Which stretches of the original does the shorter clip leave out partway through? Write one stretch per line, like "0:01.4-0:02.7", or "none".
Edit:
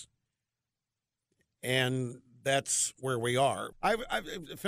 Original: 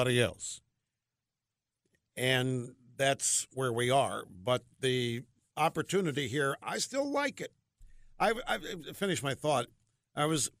0:04.3-0:08.1

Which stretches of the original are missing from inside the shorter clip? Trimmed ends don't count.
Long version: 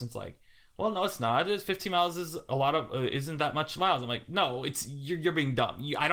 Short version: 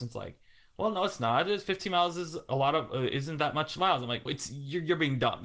0:04.3-0:04.6

